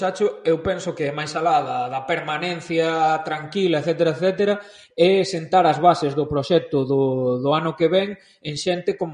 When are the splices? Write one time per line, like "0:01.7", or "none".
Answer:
none